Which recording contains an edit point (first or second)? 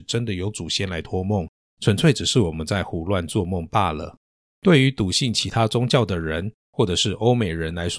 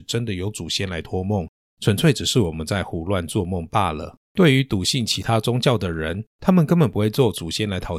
second